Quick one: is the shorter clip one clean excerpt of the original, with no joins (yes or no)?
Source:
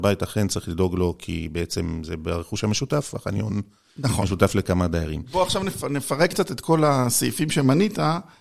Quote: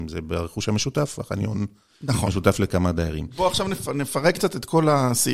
yes